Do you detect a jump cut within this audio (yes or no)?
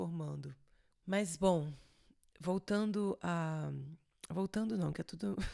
yes